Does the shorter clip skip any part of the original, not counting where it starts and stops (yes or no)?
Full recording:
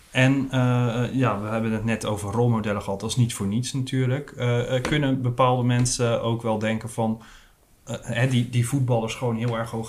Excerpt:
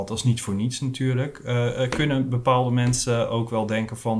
no